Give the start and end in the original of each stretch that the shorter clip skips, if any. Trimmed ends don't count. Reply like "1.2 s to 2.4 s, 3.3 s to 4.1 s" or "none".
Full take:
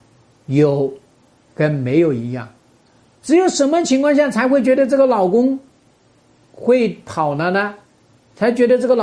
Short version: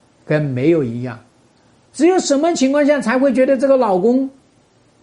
none

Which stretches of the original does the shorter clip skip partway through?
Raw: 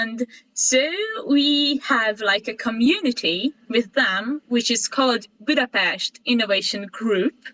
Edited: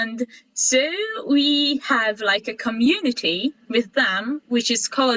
none

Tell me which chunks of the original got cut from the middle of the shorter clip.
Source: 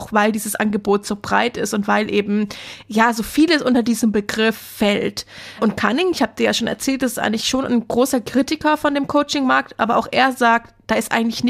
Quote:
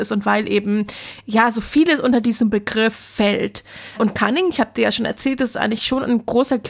none

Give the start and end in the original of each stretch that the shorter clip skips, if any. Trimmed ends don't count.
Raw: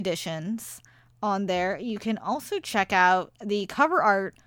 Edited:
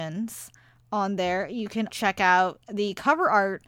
2.2 s to 2.6 s

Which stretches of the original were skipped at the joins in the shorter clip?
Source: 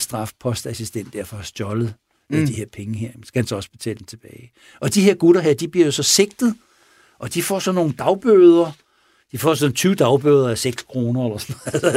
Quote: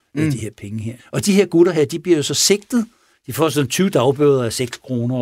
3.1 s to 4.7 s, 6.8 s to 9.2 s

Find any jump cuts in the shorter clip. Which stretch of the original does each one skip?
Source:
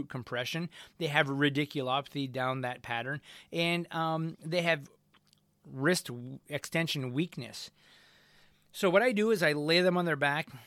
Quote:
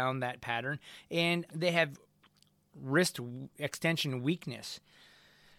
3.9 s to 4.4 s

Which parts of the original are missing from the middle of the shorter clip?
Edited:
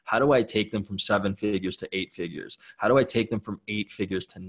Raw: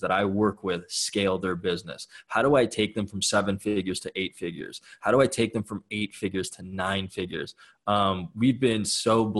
none

